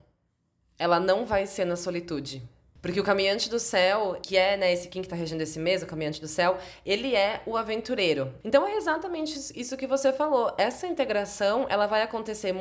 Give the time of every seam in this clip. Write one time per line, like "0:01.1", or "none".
0:08.4